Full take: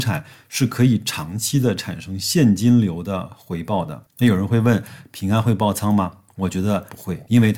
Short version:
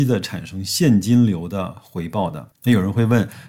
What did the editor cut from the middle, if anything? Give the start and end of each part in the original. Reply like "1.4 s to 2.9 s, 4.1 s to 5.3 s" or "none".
none